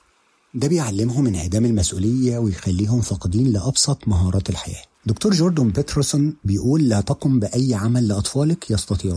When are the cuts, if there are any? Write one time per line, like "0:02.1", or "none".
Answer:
0:04.9